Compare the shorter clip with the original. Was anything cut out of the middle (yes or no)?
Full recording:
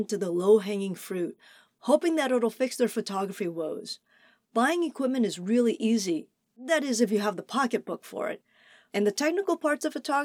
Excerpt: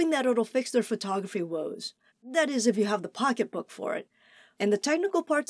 yes